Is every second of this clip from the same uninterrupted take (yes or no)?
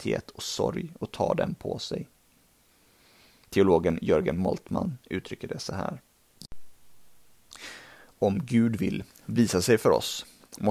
yes